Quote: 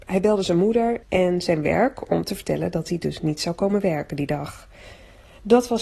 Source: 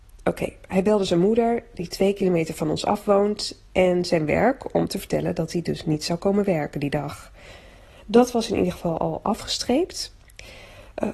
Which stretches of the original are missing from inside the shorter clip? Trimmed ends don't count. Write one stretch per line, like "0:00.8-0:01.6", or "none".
0:01.6-0:03.7

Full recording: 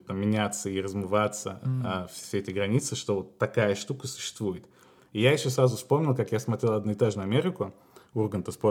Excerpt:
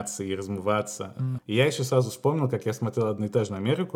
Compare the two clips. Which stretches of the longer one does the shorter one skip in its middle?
0:01.8-0:05.0

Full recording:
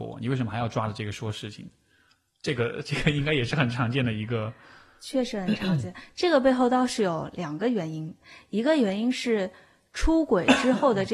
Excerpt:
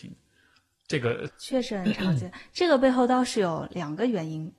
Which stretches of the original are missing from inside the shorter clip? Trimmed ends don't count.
0:02.8-0:04.9

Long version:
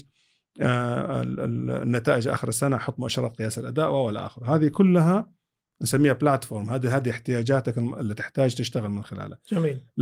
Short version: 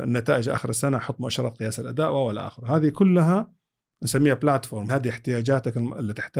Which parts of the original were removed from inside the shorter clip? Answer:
0:06.7-0:06.9

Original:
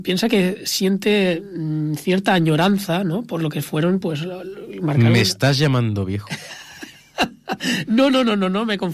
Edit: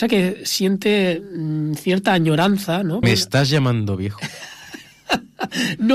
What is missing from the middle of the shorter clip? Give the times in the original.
0:03.2-0:05.1

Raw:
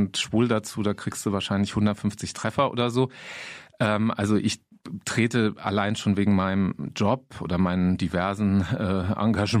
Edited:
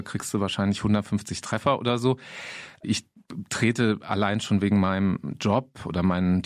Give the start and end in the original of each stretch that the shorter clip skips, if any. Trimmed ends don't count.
0:03.8-0:04.4

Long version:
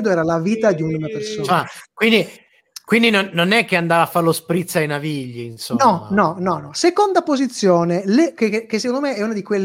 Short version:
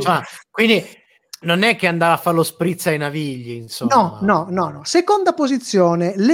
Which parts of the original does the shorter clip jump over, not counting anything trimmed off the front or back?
0:02.8-0:03.3

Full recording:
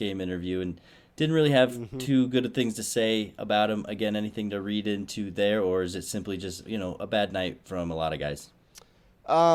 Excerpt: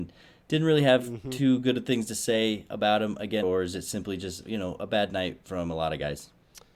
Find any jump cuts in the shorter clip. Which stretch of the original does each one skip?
0:04.1-0:05.6

